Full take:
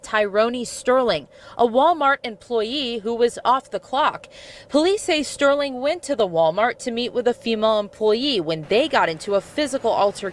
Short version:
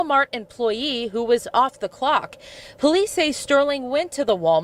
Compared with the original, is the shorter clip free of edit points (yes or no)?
yes